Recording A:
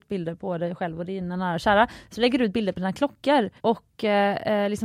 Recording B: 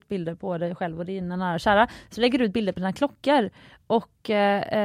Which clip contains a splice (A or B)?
A